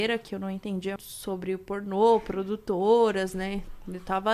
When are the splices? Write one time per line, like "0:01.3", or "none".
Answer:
0:01.0